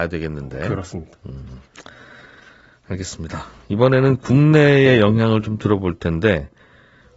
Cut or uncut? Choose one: uncut